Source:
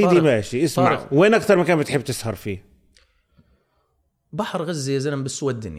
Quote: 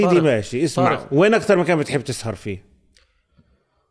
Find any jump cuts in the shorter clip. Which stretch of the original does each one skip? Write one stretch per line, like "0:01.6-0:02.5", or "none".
none

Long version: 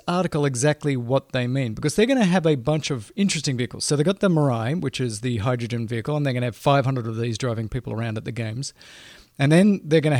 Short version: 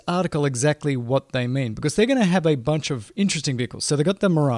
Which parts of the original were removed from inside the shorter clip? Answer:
none

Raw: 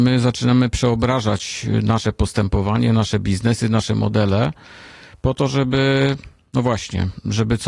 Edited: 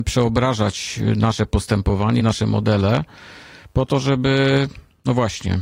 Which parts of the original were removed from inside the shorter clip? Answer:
0:02.9-0:03.7

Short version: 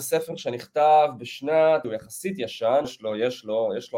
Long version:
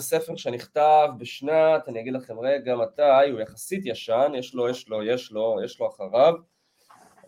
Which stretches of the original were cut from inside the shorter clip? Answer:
0:01.8-0:03.3
0:04.3-0:04.7

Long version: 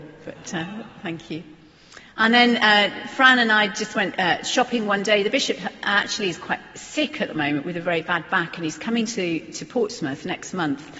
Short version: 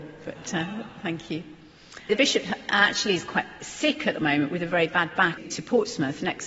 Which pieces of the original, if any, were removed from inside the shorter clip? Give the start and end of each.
0:02.1-0:05.2
0:08.5-0:09.4

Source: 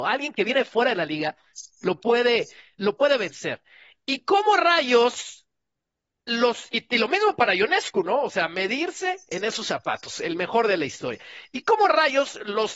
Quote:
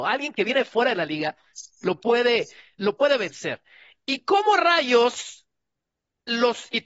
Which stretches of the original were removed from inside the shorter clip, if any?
none

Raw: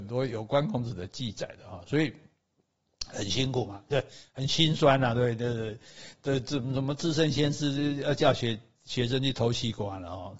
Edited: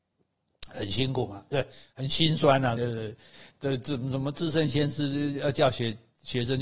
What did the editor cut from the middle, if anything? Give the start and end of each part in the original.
0:05.1-0:05.4

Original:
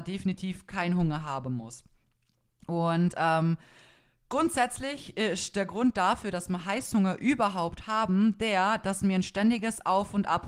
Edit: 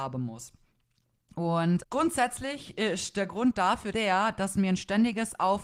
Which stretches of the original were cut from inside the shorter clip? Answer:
0:03.1-0:04.2
0:06.3-0:08.4

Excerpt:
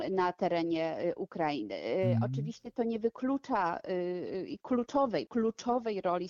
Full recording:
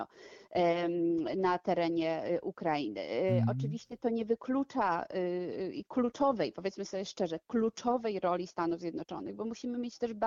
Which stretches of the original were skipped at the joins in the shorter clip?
0:06.5-0:07.5

